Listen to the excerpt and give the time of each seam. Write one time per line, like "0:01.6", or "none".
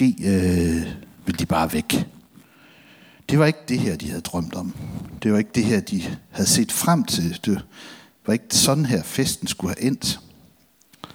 none